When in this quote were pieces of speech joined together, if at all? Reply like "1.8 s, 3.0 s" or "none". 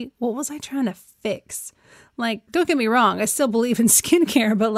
none

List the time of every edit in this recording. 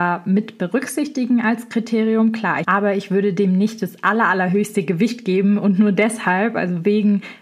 2.6 s

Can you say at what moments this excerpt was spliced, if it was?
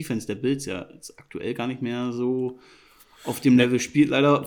none

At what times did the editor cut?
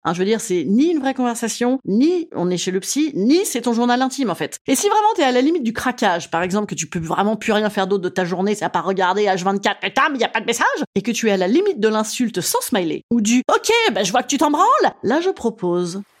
4.6 s

